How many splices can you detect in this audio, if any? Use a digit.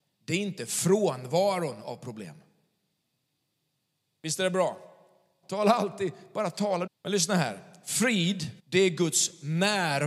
3